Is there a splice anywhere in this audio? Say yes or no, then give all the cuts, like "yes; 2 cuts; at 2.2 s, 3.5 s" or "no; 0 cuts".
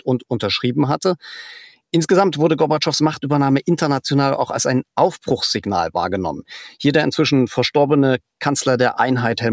no; 0 cuts